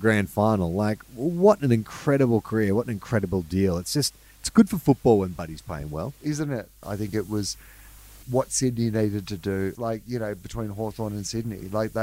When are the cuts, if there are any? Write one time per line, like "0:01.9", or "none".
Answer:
0:06.8
0:08.2
0:09.8

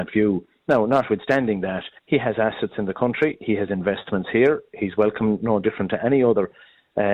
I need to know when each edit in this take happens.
0:02.0

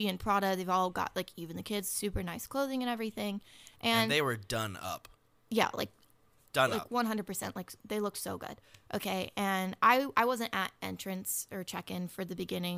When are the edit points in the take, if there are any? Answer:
none

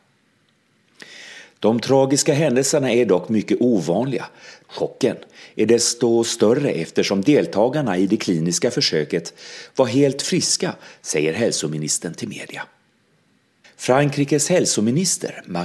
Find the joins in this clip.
0:04.6
0:13.6

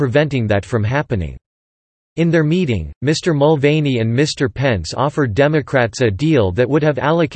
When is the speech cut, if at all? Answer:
none

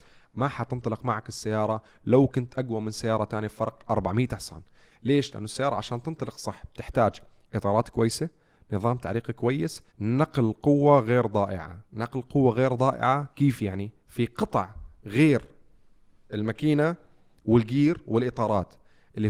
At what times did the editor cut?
0:09.9
0:11.8

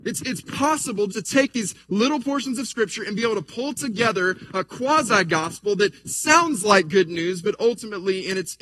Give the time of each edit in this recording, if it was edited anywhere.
0:01.1

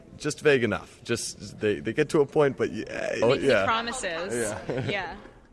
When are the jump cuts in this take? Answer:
0:03.2

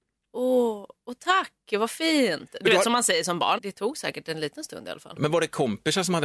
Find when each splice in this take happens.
0:03.6
0:05.2

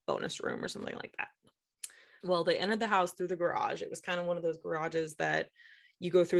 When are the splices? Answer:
0:02.2

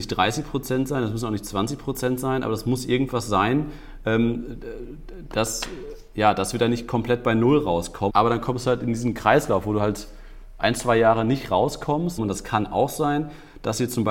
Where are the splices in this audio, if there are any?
0:08.1
0:12.2

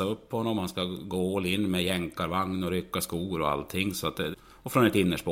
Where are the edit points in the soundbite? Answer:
0:04.3

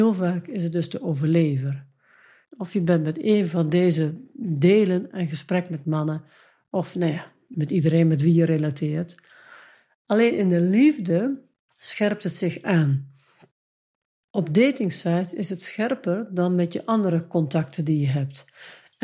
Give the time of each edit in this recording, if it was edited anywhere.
0:02.4
0:07.5

